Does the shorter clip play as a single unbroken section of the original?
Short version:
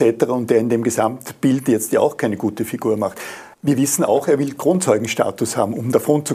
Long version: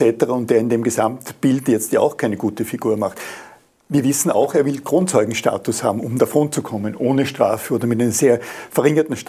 no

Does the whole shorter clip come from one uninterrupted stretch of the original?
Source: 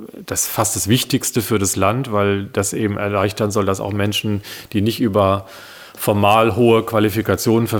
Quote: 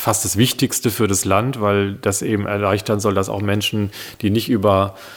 yes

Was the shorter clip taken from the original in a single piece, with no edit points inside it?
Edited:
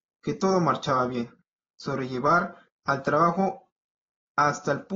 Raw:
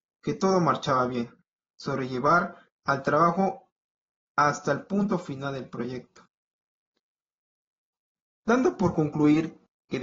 yes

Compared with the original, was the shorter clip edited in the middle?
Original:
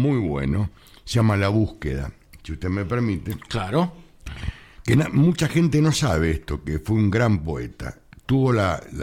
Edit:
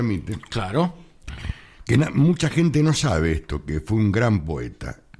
no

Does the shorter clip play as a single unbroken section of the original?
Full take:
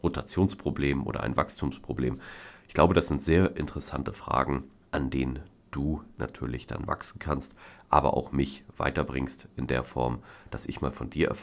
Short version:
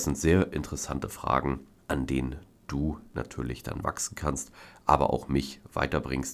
yes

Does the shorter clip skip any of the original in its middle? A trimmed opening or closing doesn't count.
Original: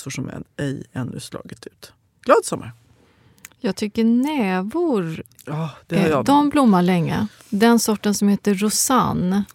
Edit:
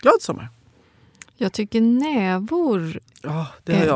no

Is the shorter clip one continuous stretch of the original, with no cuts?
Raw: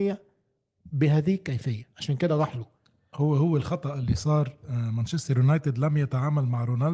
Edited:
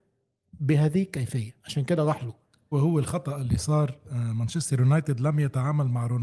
no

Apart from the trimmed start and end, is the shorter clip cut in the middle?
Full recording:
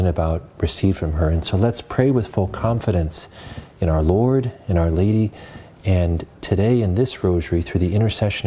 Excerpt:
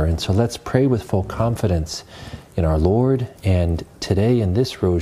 yes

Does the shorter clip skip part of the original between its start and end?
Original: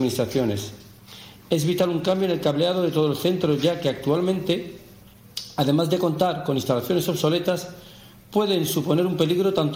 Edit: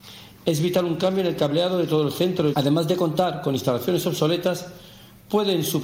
yes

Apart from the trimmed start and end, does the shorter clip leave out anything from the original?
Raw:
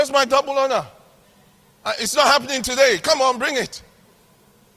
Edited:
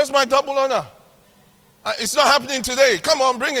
no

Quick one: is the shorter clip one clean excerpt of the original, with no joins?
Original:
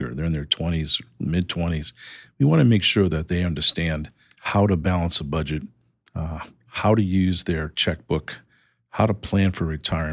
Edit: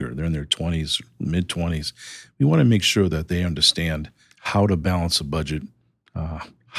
yes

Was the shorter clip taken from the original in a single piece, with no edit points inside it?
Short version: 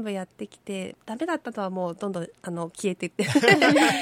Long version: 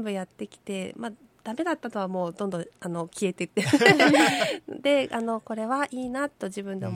no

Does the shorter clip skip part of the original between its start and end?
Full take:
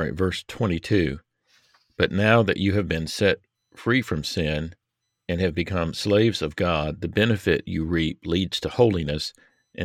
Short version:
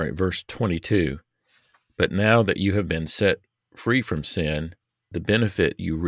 yes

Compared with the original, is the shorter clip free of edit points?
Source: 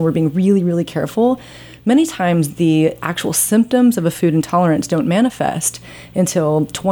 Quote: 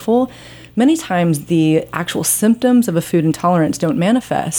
yes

